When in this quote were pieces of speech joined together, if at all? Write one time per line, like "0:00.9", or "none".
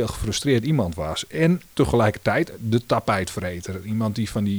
0:01.7